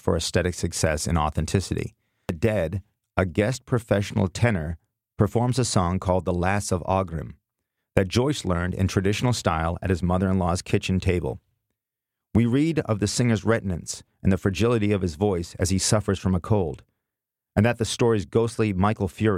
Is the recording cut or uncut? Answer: uncut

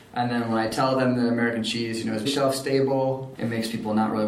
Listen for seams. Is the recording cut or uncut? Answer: cut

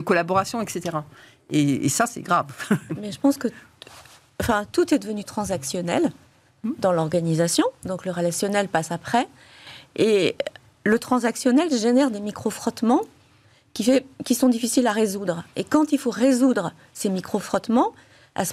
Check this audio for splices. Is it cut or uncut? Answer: uncut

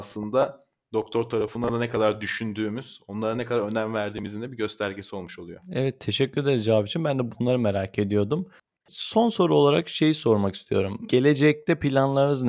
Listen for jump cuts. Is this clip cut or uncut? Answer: uncut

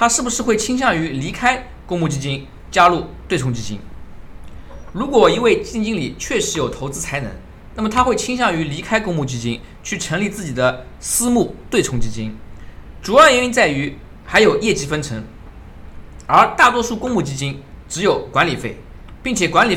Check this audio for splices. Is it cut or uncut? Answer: cut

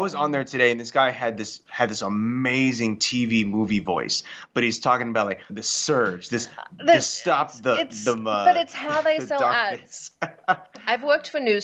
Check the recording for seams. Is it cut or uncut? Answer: cut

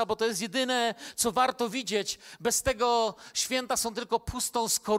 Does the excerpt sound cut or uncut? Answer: uncut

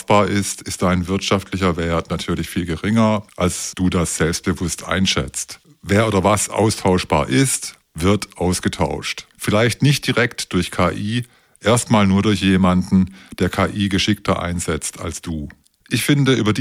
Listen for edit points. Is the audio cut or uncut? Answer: uncut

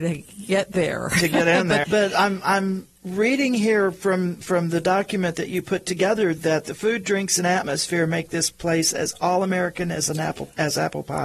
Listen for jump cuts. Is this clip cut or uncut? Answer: cut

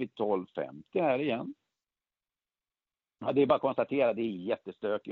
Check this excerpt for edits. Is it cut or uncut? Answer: uncut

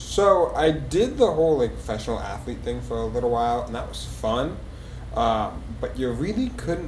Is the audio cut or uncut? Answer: uncut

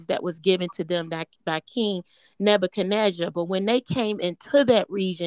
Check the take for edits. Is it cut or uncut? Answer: uncut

